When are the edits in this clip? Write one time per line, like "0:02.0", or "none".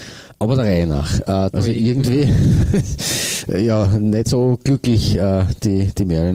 0:01.5